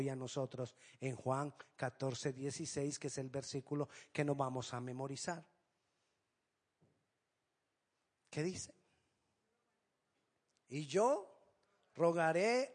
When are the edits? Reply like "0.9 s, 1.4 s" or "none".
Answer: none